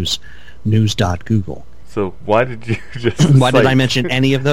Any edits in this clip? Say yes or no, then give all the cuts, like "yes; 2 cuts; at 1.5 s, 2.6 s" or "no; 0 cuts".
yes; 1 cut; at 1.8 s